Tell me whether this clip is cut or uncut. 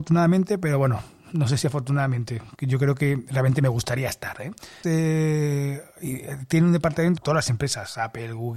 cut